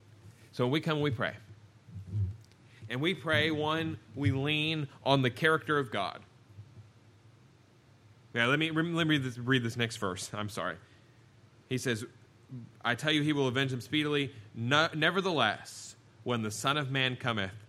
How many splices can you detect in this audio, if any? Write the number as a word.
zero